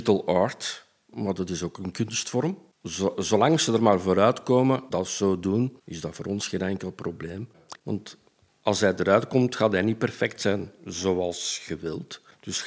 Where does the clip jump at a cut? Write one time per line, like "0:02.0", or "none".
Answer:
0:07.8